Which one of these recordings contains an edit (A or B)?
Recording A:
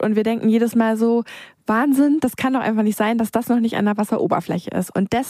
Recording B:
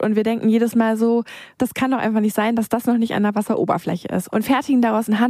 B